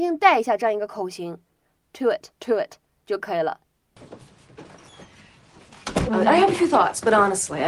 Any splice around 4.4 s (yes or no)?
no